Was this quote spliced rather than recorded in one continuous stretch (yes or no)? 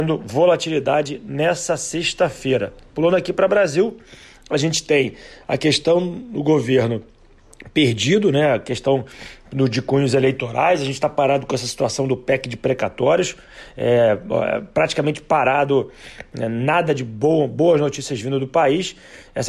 no